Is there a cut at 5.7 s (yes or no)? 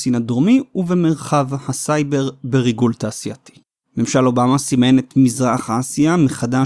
no